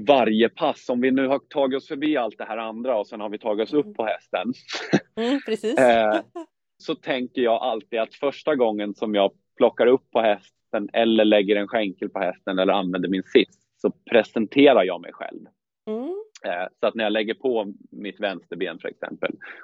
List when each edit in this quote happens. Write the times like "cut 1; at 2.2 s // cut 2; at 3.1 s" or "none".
cut 1; at 6.8 s